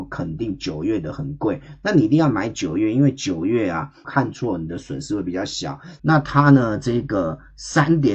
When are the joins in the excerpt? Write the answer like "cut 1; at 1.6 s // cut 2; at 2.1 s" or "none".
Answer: cut 1; at 4.0 s // cut 2; at 6.0 s